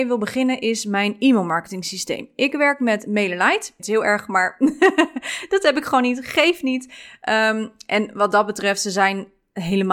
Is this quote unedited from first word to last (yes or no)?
no